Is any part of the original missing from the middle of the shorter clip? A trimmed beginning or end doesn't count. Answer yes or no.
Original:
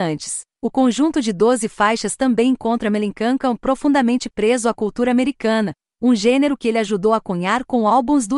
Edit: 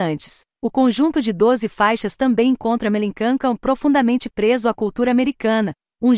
no